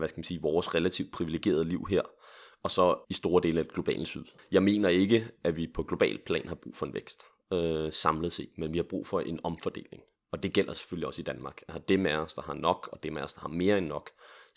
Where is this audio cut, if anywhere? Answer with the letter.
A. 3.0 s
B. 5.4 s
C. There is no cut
A